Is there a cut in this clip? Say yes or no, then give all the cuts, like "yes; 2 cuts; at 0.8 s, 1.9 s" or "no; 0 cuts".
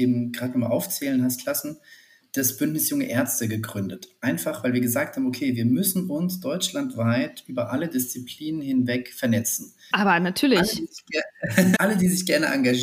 yes; 2 cuts; at 9.9 s, 11.8 s